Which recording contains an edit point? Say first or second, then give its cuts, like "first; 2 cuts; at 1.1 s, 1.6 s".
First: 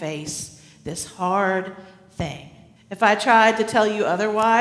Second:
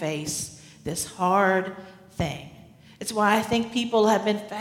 first; 1 cut; at 2.8 s